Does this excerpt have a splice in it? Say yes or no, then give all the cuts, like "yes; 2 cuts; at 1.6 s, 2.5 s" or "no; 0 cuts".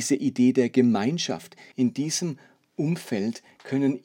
yes; 1 cut; at 1.7 s